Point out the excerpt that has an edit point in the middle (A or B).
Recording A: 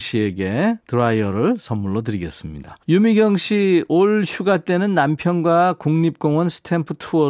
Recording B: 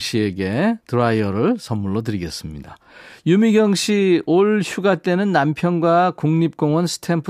A